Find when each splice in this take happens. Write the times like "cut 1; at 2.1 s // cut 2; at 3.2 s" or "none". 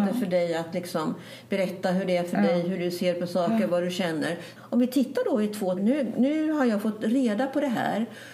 cut 1; at 4.6 s // cut 2; at 5.8 s